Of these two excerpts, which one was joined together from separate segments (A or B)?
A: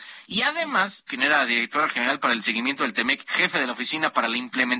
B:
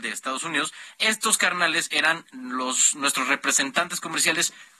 A